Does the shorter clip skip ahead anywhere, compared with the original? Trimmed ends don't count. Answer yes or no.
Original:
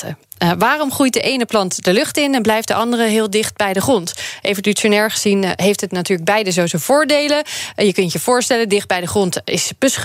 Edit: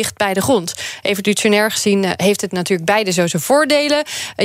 no